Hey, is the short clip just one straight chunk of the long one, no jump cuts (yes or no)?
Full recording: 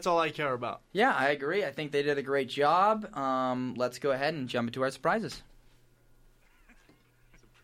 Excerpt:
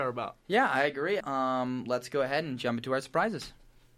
no